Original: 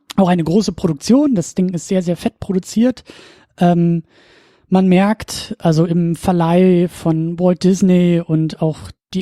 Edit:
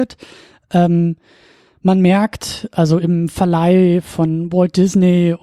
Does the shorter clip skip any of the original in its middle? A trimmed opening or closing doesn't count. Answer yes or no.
no